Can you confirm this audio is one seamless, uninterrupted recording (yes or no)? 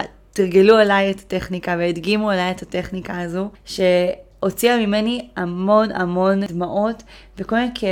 yes